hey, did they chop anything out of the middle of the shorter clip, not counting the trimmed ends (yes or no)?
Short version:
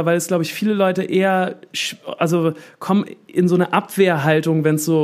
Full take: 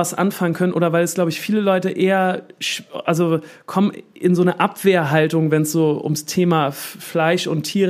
no